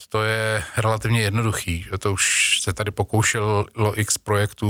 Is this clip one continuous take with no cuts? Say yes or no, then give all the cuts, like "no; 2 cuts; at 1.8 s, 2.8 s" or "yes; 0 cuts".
yes; 0 cuts